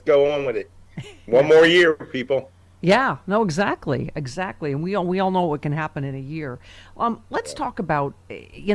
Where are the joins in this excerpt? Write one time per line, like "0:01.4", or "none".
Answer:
none